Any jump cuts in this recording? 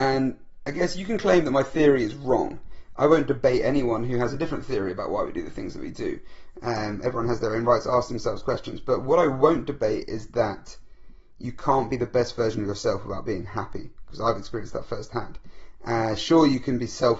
no; 0 cuts

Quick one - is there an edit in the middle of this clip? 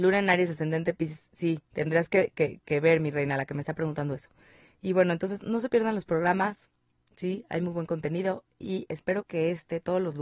no; 0 cuts

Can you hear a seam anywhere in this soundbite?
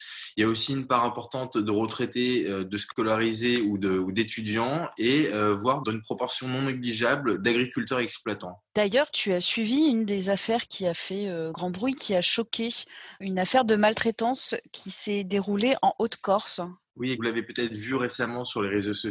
no; 0 cuts

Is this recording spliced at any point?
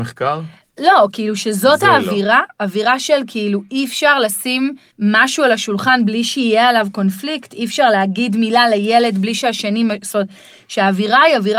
no; 0 cuts

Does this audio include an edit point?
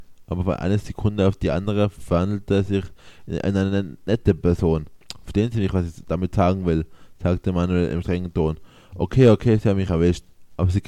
no; 0 cuts

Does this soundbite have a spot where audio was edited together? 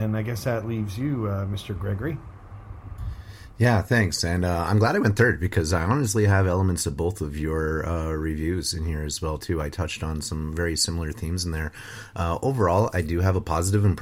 no; 0 cuts

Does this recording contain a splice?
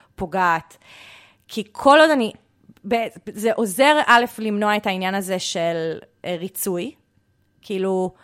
no; 0 cuts

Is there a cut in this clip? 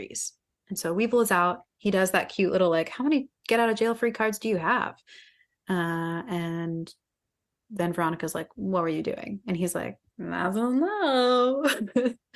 no; 0 cuts

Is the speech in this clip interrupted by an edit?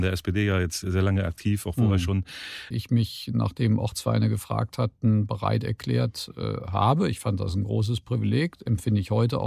yes; 1 cut; at 2.7 s

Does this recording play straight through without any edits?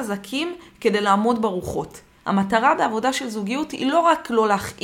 no; 1 cut; at 2.2 s

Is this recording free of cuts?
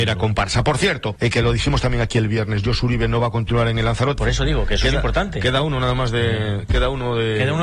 no; 2 cuts; at 1.2 s, 4.2 s

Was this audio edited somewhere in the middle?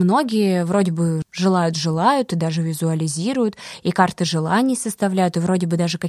yes; 1 cut; at 1.2 s

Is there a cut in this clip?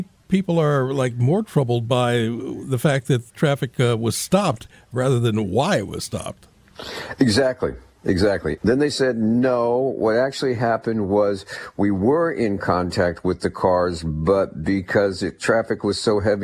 yes; 1 cut; at 8.6 s

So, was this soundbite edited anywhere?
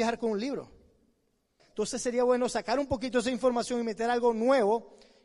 yes; 1 cut; at 1.6 s

